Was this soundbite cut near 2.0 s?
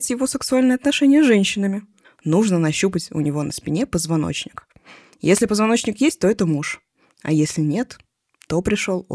yes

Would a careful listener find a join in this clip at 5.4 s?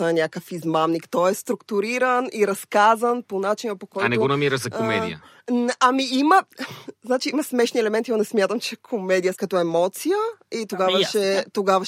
no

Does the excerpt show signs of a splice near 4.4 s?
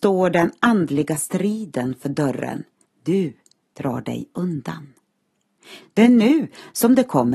no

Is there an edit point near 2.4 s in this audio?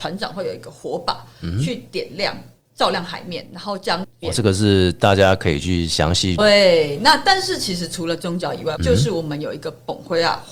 no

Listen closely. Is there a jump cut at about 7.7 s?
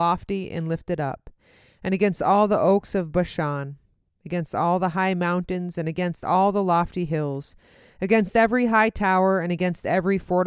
no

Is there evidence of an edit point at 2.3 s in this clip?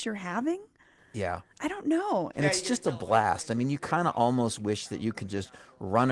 yes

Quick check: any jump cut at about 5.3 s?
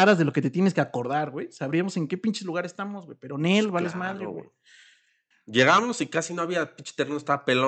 yes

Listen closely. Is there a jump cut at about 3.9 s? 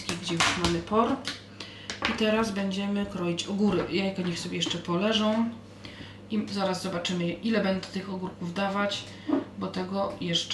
no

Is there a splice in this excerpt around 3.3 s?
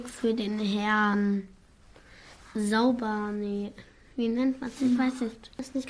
no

